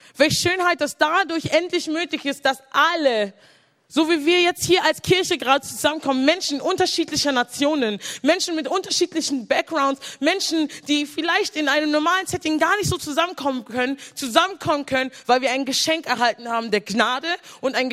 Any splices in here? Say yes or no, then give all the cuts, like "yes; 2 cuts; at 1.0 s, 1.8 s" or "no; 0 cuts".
no; 0 cuts